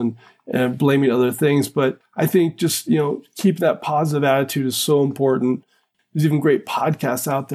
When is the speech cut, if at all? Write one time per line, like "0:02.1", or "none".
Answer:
none